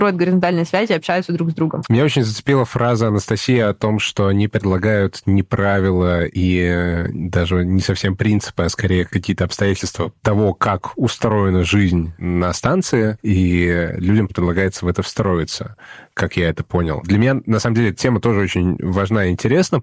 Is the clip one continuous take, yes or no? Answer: no